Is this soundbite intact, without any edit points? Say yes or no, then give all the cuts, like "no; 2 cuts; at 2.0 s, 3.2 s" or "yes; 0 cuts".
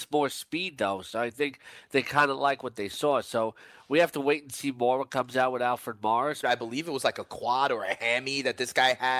no; 1 cut; at 6.4 s